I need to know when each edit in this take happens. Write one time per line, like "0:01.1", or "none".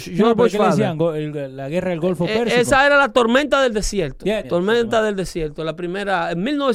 0:04.4